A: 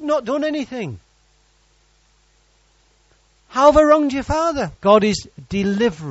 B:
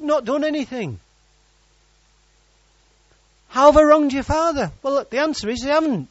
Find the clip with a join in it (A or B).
A